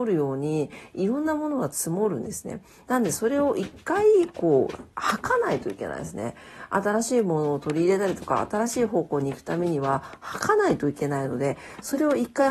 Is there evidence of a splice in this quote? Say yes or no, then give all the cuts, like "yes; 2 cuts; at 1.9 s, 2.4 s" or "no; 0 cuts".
no; 0 cuts